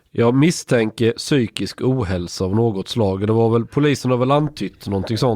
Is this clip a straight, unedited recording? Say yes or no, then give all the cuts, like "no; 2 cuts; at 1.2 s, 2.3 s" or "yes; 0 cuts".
yes; 0 cuts